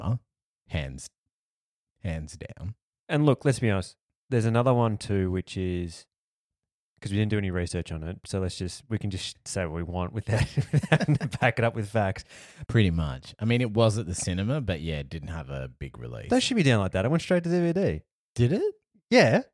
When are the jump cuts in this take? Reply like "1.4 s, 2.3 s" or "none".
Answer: 12.7 s

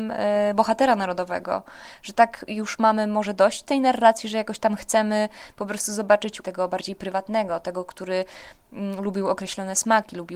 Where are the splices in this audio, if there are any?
6.4 s

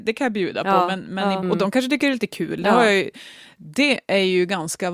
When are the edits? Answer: 1.4 s

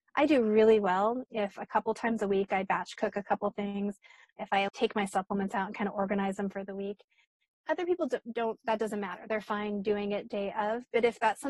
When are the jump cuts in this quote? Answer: 4.7 s

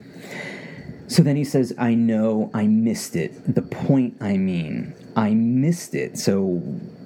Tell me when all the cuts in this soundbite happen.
1.8 s

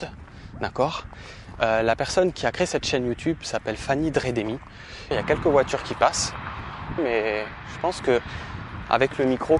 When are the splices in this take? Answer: 5.1 s, 7.0 s

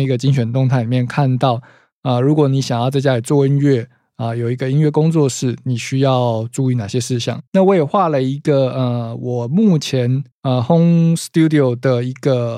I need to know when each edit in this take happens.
7.5 s, 10.3 s

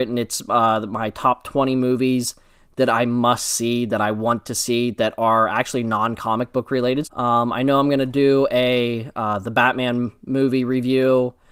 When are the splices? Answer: 7.0 s

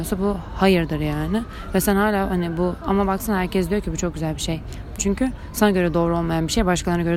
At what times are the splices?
5.0 s

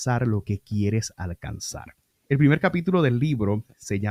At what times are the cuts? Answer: none

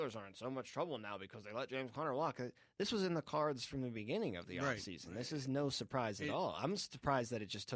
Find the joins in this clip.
none

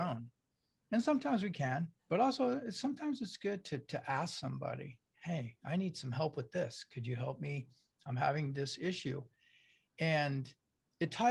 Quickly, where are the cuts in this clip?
2.0 s

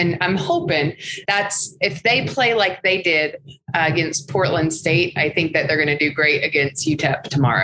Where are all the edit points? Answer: 1.3 s

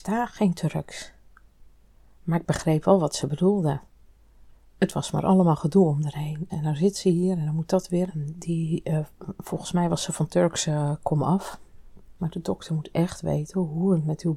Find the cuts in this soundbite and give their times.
6.5 s, 8.1 s, 12.2 s

